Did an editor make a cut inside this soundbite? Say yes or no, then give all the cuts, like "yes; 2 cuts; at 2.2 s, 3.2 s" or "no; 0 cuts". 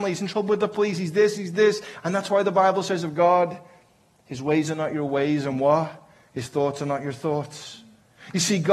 yes; 1 cut; at 1.4 s